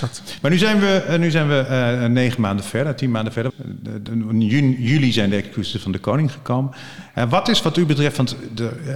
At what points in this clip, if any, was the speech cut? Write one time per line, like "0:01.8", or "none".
0:03.5